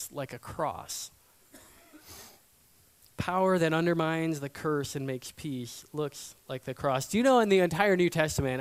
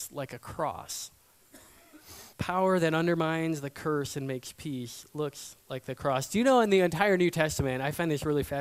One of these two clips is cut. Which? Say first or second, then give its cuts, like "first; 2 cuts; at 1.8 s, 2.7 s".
second; 1 cut; at 2.3 s